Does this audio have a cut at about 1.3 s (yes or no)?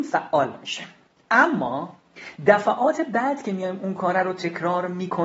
no